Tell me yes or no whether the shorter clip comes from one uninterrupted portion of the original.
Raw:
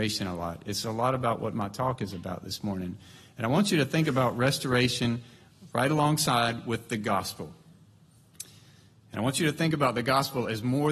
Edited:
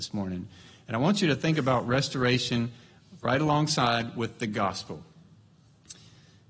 yes